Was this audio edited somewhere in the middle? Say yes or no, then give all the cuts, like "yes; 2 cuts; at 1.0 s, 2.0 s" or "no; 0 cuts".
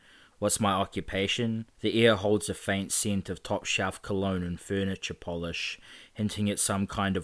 yes; 1 cut; at 1.7 s